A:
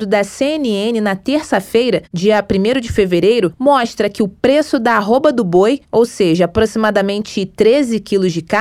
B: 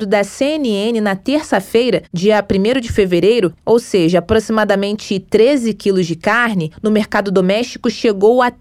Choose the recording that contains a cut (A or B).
B